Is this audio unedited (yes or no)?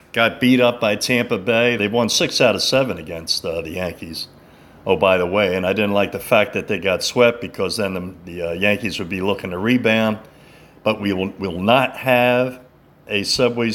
no